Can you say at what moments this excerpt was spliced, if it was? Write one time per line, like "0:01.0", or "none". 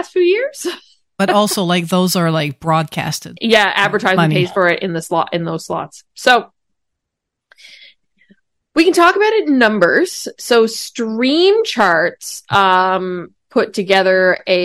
0:03.4